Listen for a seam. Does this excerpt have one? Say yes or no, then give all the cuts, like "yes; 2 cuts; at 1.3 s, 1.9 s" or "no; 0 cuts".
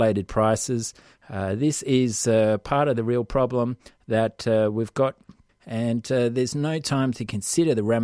yes; 2 cuts; at 1.1 s, 5.5 s